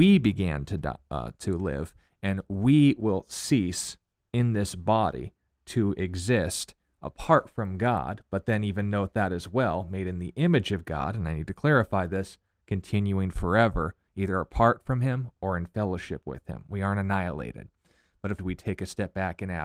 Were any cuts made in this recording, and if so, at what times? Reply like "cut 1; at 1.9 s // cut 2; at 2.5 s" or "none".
cut 1; at 18.4 s